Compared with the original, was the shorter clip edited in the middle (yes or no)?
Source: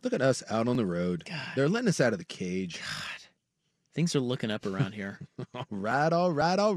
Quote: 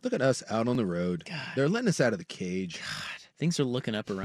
yes